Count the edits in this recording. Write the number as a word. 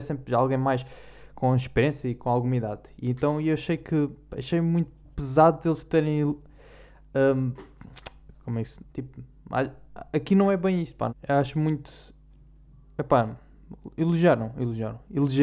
two